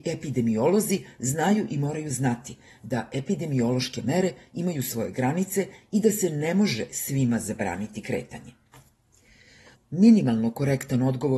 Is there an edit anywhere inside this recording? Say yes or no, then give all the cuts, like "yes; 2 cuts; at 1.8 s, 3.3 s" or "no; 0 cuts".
yes; 1 cut; at 9.7 s